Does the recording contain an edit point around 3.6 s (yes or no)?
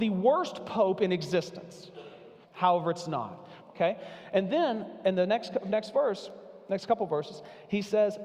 yes